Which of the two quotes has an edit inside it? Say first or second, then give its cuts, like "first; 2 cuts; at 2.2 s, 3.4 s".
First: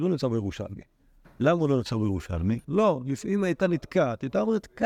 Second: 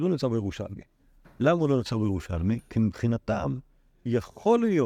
first; 1 cut; at 2.6 s